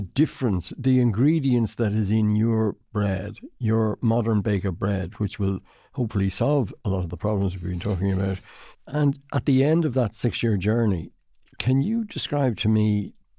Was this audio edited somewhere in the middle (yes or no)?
yes